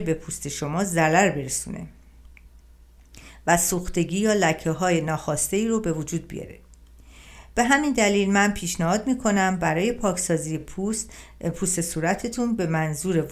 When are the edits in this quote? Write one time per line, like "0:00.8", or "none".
none